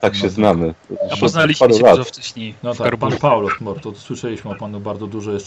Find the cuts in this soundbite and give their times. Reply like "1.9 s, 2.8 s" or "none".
3.6 s